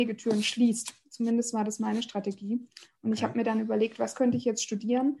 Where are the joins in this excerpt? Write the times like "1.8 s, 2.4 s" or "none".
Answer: none